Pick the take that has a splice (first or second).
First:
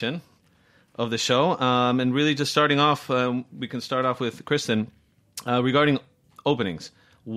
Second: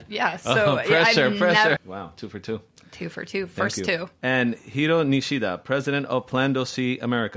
second